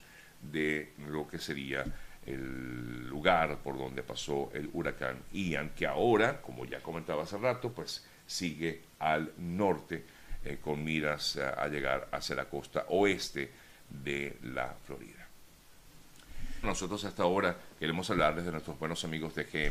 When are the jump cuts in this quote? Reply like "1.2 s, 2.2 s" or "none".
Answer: 16.6 s

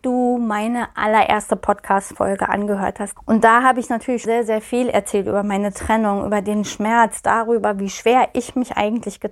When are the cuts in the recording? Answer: 3.2 s, 4.3 s

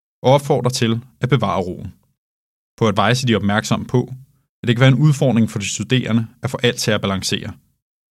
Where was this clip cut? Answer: 2.6 s

